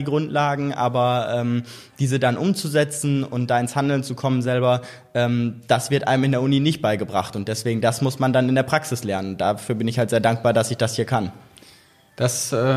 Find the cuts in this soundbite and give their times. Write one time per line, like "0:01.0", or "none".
none